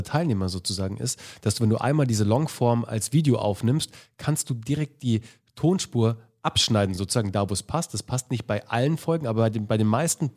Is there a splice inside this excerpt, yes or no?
no